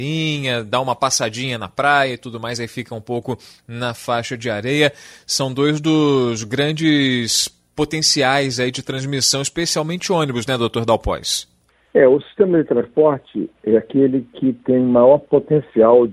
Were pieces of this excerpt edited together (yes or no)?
no